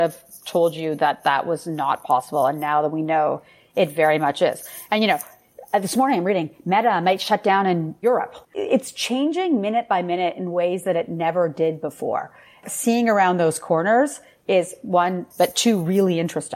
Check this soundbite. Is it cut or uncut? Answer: cut